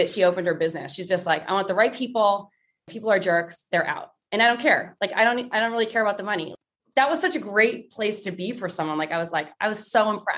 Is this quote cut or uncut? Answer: uncut